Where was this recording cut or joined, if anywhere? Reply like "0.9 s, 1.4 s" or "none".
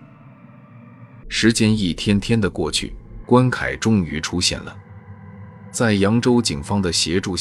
1.2 s, 3.2 s